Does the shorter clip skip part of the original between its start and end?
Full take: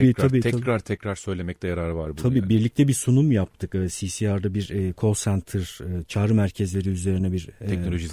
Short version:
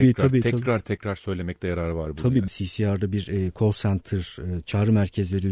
yes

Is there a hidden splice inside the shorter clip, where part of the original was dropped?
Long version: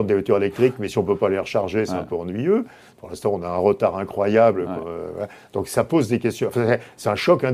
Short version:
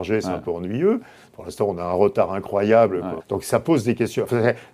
yes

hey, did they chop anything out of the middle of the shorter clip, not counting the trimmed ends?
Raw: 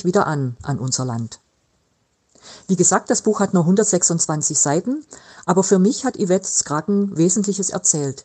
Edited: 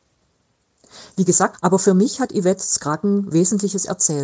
yes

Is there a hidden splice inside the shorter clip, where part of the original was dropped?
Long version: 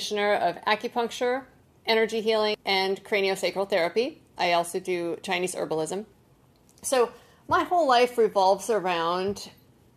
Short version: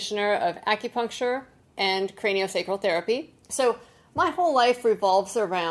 yes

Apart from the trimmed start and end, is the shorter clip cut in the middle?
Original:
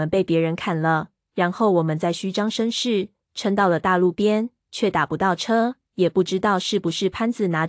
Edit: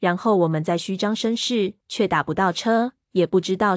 yes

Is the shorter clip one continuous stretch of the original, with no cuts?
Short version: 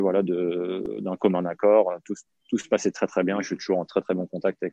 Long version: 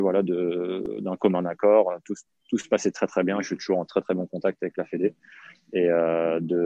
yes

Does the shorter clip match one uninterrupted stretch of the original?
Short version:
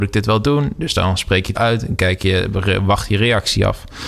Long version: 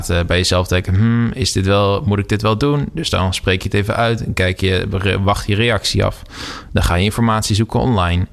no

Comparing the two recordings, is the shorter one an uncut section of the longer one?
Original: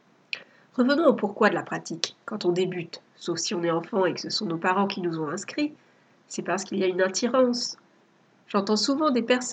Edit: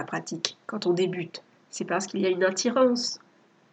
no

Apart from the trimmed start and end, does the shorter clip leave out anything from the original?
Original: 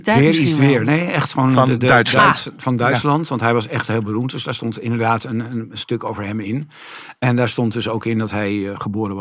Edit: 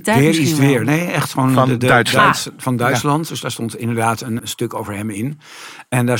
yes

